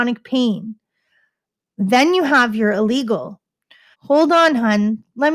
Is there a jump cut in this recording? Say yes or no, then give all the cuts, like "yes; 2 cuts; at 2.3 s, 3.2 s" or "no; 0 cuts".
yes; 1 cut; at 3.9 s